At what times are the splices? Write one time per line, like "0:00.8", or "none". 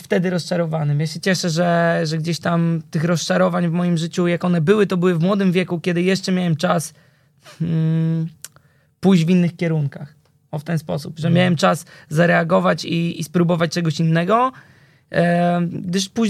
none